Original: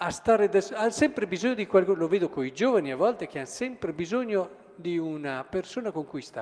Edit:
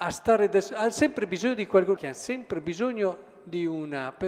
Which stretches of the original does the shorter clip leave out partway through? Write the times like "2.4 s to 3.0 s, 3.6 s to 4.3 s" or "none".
2.0 s to 3.3 s